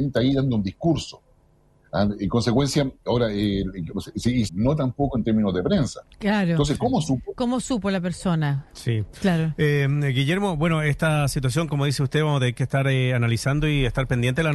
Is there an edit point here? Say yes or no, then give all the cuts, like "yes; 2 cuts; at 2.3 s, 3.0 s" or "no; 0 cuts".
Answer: yes; 1 cut; at 4.5 s